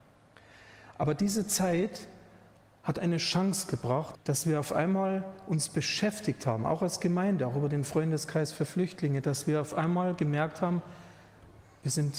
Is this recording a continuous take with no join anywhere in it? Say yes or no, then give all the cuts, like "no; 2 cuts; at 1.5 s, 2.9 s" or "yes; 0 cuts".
no; 1 cut; at 4.1 s